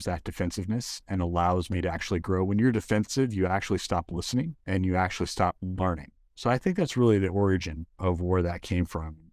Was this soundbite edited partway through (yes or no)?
no